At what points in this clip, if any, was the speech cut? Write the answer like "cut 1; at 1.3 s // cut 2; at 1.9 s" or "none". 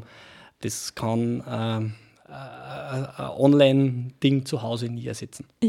none